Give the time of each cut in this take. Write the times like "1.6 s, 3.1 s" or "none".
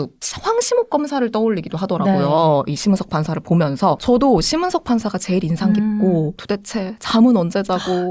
4.0 s, 6.4 s